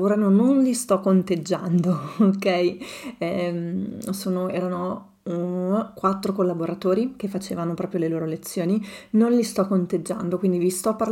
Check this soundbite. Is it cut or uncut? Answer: uncut